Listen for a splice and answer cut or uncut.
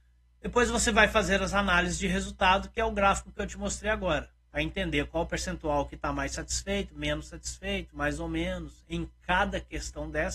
uncut